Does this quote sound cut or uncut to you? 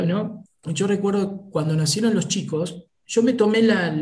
uncut